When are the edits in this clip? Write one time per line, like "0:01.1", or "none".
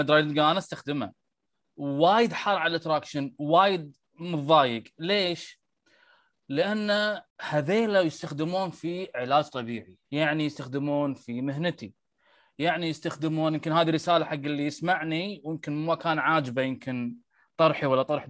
0:07.3
0:10.0